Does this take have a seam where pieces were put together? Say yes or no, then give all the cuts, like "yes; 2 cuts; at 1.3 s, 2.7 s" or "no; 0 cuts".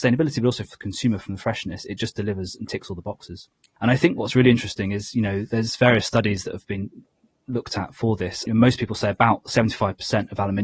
yes; 2 cuts; at 3.8 s, 8.5 s